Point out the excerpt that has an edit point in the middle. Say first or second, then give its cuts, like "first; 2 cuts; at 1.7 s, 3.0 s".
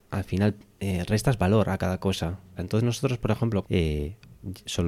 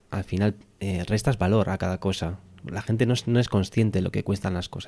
first; 2 cuts; at 2.6 s, 3.6 s